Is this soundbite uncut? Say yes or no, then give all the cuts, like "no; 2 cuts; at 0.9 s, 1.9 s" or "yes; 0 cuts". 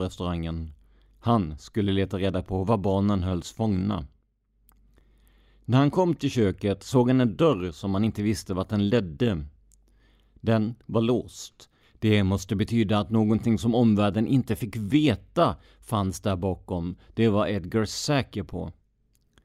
yes; 0 cuts